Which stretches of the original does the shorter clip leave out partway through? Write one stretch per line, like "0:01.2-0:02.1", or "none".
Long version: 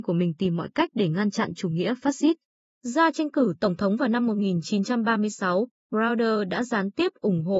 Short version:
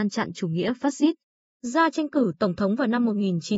none